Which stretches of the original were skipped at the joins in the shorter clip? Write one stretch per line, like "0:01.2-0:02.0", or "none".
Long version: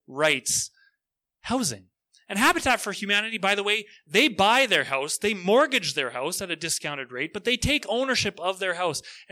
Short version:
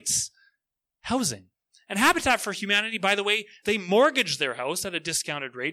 0:04.0-0:05.2

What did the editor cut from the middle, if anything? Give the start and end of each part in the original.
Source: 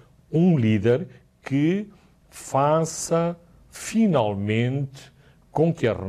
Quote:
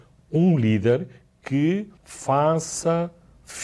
0:02.0-0:02.2

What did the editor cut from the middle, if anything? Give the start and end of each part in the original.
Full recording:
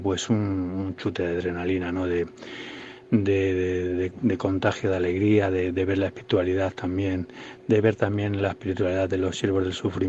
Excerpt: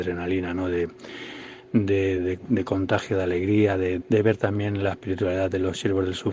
0:03.5-0:03.9
0:05.7-0:07.6

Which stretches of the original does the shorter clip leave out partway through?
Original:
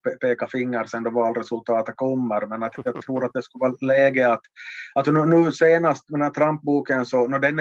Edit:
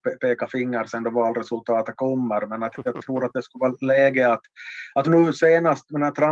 0:05.0-0:05.2

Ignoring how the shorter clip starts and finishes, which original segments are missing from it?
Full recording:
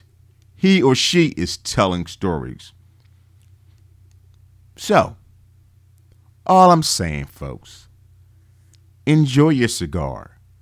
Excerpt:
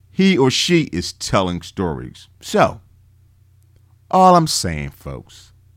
0:02.8-0:04.7

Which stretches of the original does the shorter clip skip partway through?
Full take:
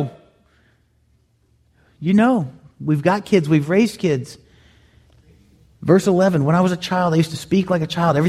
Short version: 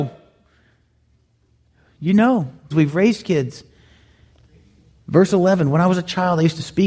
0:02.7-0:03.4

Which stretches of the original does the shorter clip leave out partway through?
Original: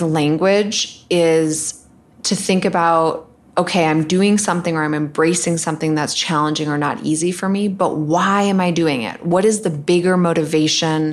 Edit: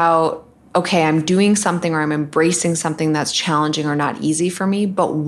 none

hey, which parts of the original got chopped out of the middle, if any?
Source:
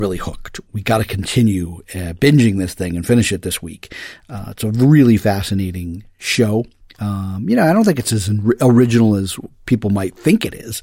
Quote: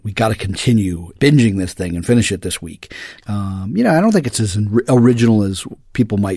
0:01.8-0:02.2
0:04.2-0:06.9

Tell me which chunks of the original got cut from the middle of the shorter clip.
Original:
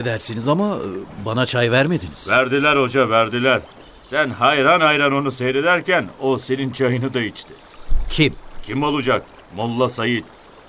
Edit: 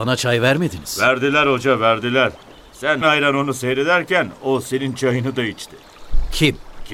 0:04.3-0:04.8

